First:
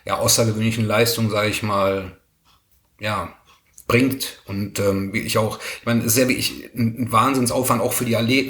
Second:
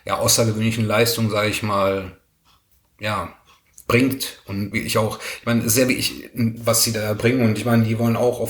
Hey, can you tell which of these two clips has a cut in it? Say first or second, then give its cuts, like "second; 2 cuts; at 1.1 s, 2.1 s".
second; 2 cuts; at 4.7 s, 6.6 s